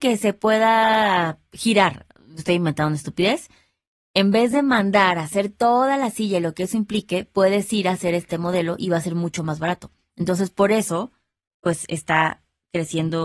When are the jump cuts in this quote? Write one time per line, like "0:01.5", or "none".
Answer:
none